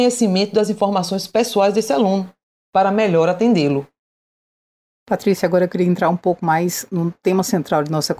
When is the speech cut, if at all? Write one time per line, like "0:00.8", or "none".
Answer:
none